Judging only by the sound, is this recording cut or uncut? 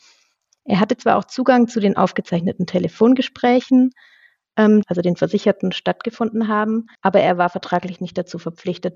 cut